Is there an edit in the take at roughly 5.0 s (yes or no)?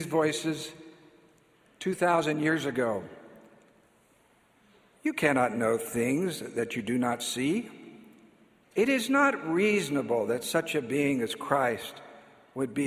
no